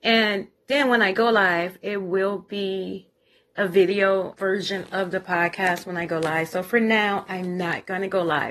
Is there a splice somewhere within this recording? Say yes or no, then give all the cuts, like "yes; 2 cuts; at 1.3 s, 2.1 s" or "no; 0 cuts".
yes; 1 cut; at 4.3 s